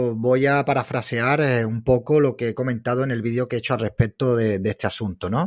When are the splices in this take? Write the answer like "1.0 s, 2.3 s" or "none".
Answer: none

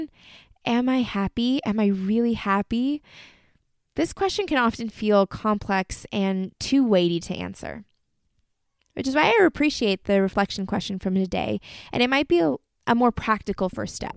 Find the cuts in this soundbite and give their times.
none

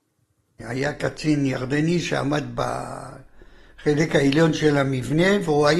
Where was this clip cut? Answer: none

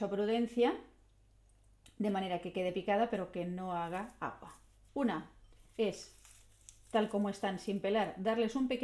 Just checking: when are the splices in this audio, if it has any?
4.9 s

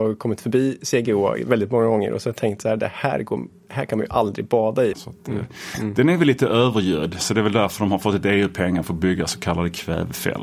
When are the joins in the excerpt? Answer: 4.9 s

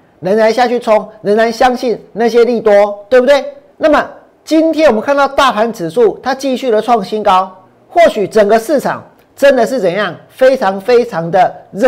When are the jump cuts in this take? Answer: 3.7 s

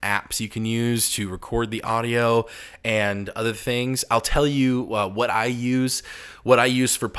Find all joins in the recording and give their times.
none

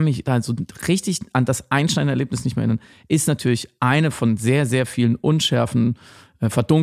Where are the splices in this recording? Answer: none

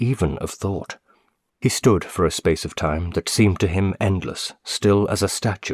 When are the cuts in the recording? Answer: 1.5 s

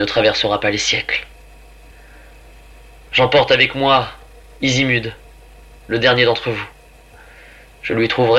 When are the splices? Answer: 3.1 s

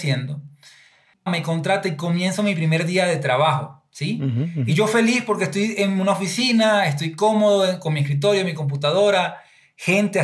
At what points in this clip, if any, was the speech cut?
1.3 s

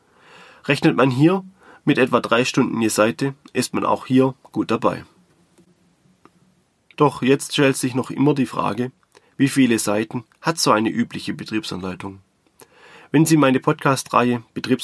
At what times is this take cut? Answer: 6.9 s

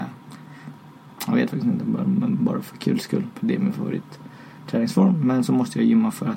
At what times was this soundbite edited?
3.3 s

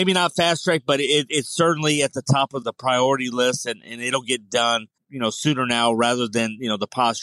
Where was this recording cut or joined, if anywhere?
2.6 s, 5.0 s

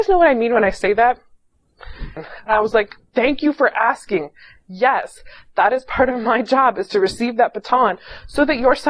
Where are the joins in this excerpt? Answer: 2.2 s

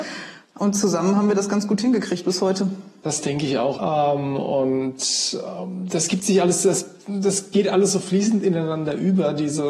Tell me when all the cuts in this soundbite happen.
3.7 s

